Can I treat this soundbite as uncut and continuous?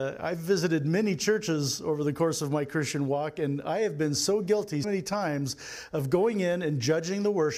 no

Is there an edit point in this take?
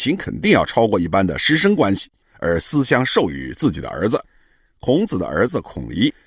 yes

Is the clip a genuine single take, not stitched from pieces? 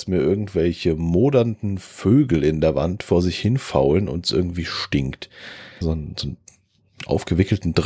no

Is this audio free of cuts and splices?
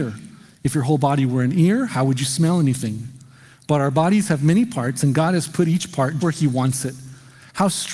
no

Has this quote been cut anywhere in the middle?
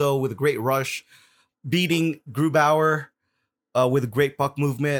yes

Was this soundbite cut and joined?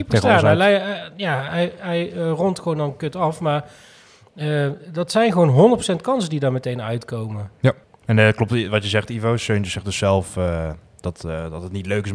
yes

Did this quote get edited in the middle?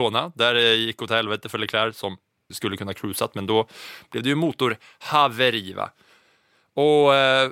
yes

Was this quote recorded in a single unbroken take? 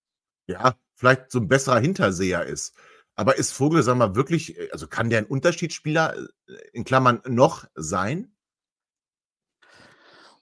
yes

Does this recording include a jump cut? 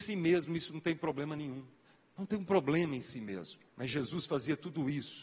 yes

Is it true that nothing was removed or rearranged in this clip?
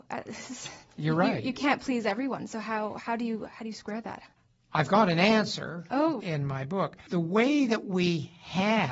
no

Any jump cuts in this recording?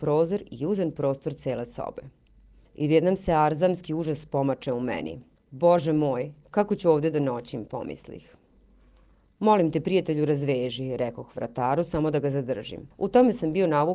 yes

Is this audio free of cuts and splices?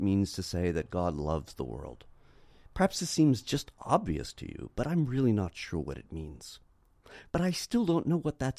no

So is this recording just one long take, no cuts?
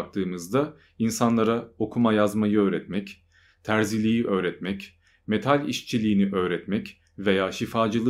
yes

